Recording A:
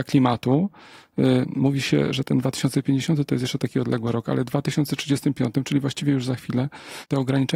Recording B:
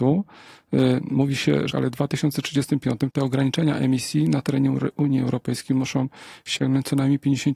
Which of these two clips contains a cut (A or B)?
B